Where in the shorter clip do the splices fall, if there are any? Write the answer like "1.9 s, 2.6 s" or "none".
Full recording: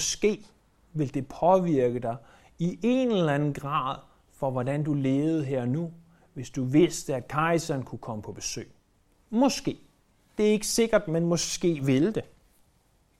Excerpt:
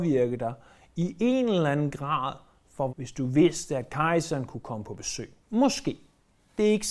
2.9 s, 5.4 s